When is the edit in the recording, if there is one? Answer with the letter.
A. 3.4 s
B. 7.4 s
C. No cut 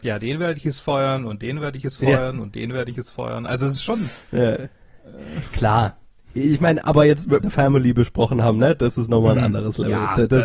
B